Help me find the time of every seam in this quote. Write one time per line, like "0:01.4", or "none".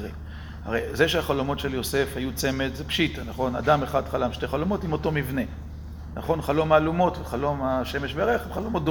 none